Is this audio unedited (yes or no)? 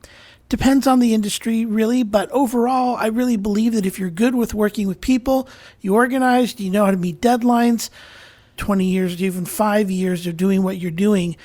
no